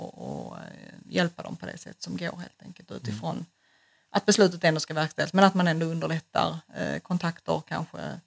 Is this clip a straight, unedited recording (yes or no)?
yes